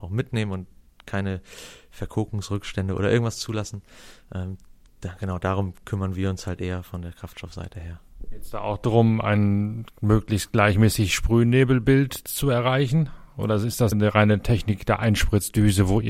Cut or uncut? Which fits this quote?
cut